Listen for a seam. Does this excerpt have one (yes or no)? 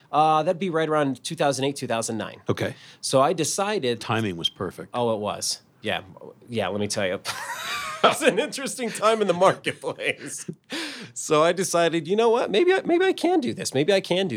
no